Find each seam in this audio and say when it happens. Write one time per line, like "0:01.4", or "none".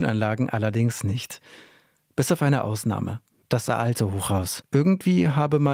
0:03.4
0:04.6